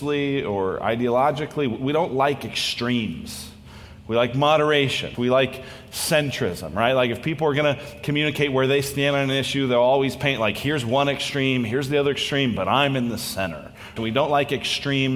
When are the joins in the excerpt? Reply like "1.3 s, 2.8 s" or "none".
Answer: 5.1 s, 14.0 s